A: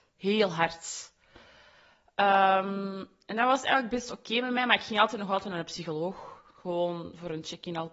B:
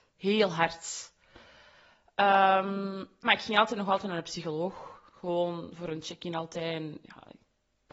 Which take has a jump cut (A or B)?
B